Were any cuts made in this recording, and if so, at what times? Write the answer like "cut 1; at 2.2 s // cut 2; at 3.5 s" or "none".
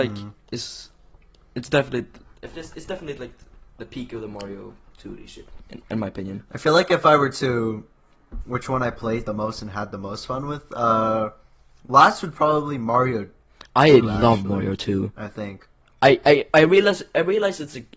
cut 1; at 8.4 s